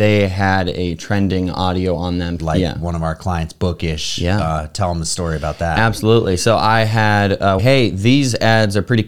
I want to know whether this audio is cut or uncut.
cut